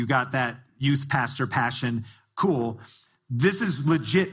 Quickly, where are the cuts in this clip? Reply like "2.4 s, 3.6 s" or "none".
none